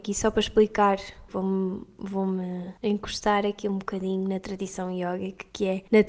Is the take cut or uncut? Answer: cut